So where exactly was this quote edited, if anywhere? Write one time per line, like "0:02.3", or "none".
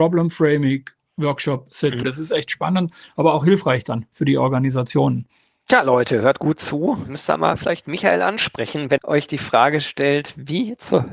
0:02.0
0:09.0